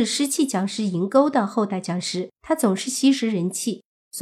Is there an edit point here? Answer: yes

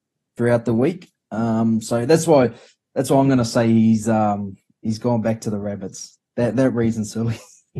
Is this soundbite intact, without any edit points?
yes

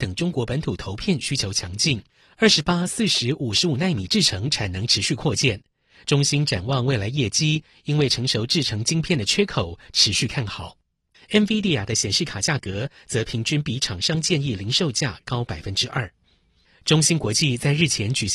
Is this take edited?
yes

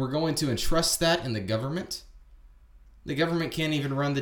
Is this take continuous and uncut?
yes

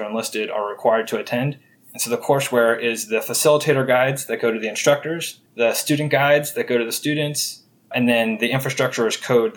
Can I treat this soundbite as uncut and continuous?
no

